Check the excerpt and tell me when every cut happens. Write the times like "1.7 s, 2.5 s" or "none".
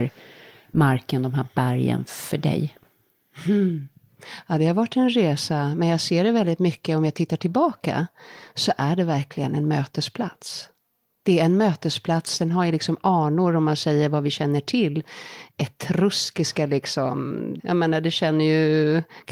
none